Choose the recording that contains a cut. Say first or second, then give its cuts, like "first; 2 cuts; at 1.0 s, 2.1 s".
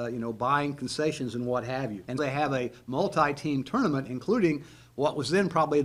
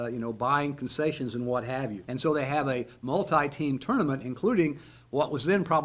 first; 1 cut; at 2.2 s